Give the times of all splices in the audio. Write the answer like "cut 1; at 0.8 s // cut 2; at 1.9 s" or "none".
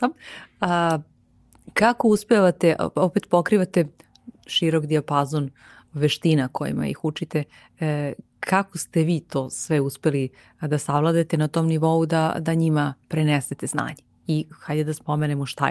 none